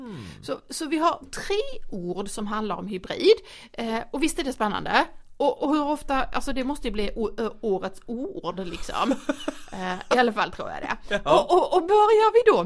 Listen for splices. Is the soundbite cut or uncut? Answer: uncut